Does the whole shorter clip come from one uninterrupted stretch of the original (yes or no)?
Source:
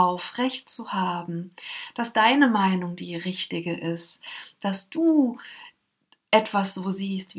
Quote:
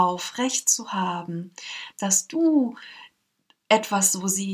no